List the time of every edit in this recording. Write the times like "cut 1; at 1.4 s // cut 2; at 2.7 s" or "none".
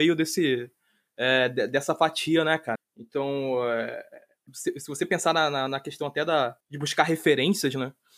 cut 1; at 2.8 s // cut 2; at 6.6 s